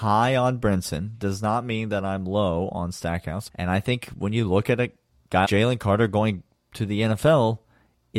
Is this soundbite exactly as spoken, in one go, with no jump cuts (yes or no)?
no